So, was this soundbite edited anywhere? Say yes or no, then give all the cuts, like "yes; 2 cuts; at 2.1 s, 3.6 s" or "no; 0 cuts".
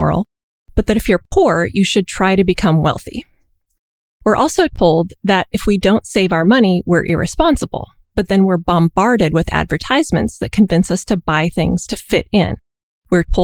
no; 0 cuts